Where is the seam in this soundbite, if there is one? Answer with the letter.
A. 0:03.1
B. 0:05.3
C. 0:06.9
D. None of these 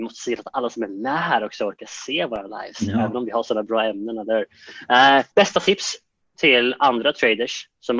B